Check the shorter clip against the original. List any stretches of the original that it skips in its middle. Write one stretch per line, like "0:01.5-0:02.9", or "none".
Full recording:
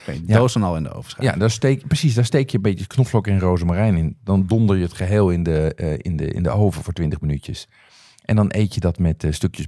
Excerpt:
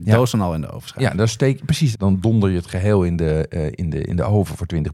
0:02.1-0:04.2